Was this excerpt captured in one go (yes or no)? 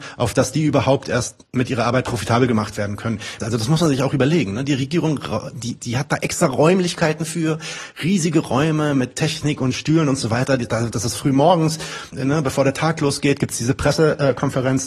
no